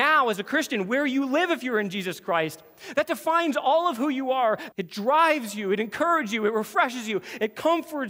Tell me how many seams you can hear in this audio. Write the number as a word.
one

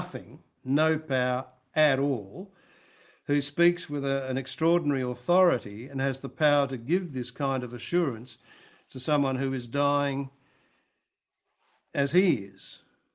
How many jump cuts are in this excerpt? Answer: zero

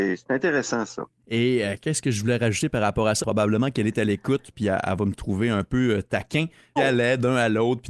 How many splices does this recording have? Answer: three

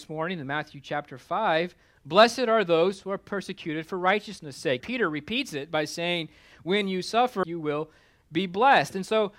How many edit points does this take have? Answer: two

